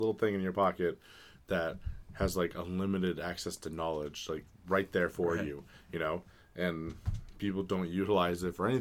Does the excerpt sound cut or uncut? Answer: uncut